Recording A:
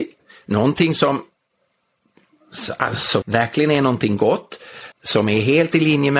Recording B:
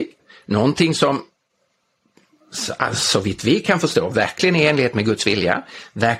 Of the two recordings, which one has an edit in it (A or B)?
A